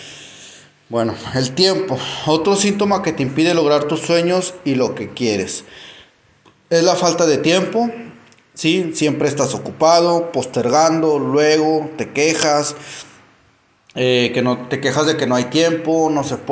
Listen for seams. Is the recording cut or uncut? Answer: uncut